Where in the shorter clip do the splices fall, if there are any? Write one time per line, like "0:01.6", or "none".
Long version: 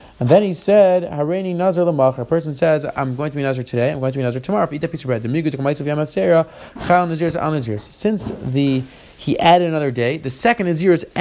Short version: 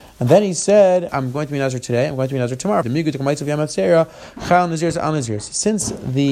0:01.1
0:02.8